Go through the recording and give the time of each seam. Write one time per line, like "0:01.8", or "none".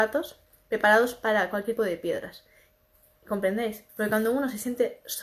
0:01.8
0:03.9

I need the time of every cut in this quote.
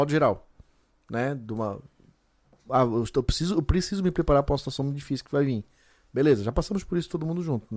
none

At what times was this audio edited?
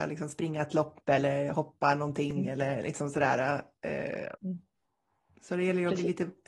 0:04.4

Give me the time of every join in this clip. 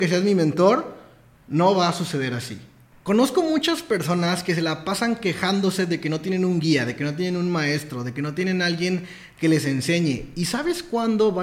none

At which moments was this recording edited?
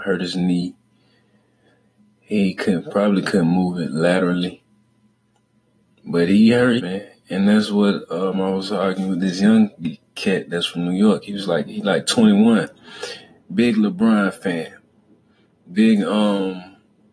0:06.8

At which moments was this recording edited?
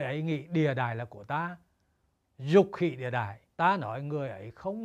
0:03.5

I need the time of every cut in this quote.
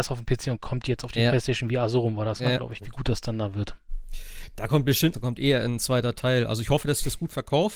0:02.8
0:05.1

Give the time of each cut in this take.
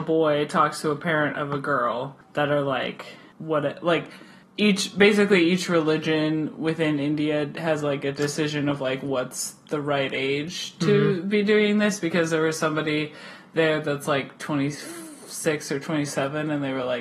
none

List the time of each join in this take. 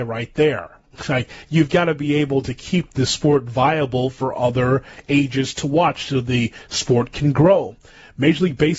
none

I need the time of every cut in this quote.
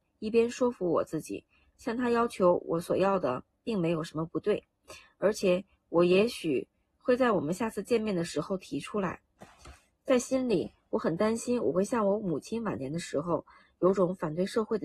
none

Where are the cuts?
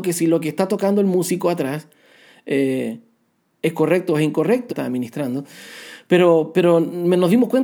0:04.7

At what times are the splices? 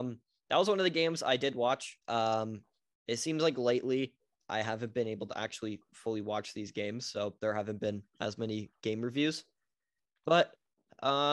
0:02.0

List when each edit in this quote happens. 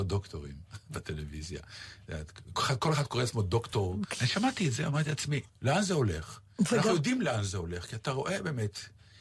0:04.1
0:05.5

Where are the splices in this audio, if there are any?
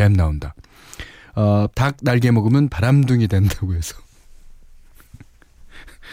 0:01.7

